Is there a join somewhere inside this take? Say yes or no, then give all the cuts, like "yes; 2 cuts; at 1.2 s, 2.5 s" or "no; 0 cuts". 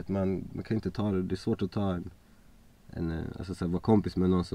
no; 0 cuts